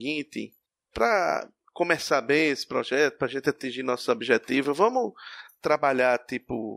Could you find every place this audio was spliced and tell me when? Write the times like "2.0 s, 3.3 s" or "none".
none